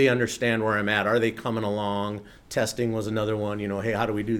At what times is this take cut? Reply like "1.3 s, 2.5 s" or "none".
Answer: 2.4 s